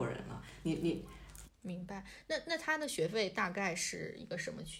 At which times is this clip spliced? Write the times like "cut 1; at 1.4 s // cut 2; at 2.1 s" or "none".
cut 1; at 1.4 s